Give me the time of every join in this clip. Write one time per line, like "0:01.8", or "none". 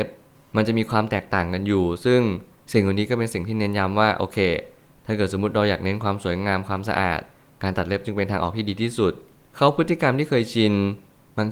none